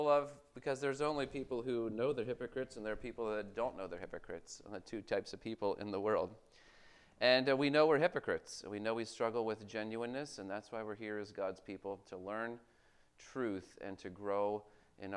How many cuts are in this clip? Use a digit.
0